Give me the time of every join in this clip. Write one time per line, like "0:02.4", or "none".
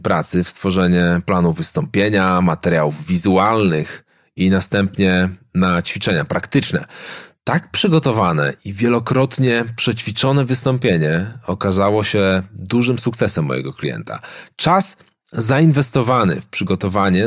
none

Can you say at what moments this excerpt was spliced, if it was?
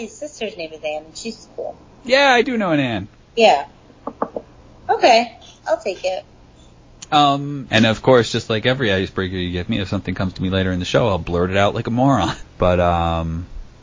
0:07.7
0:12.4

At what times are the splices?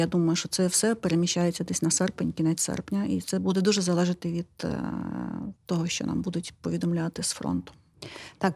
0:05.6

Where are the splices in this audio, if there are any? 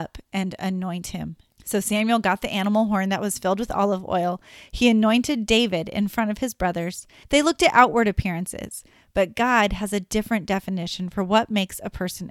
0:01.5
0:07.2

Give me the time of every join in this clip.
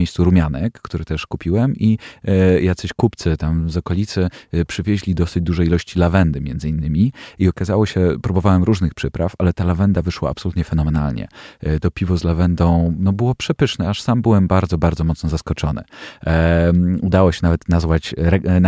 none

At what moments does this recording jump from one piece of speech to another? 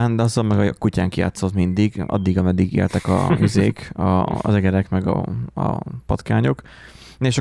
none

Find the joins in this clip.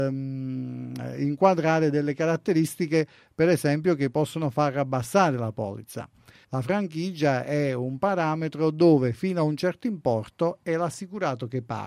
0:06.4

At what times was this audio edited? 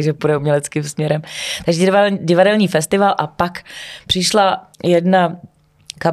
0:04.7

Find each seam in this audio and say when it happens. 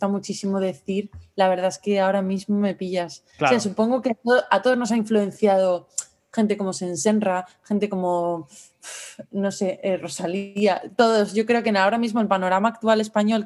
none

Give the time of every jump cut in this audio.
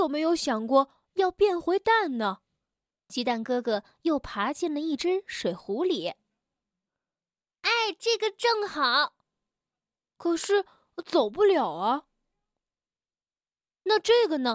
0:02.9

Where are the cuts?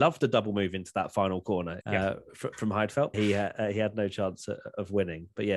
0:01.8
0:03.1

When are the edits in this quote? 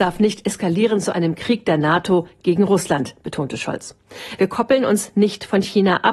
0:04.4

